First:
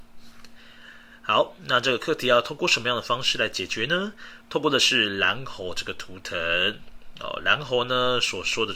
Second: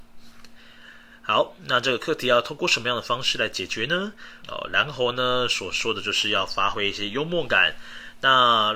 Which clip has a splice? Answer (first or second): second